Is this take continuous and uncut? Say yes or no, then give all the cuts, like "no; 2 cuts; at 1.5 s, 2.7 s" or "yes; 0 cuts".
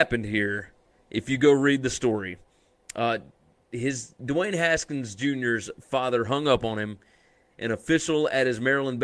no; 1 cut; at 7.5 s